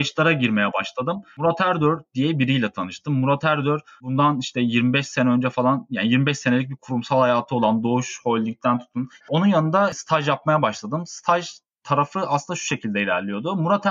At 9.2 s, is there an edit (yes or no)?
yes